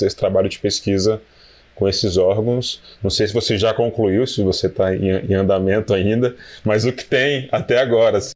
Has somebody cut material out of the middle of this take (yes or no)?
no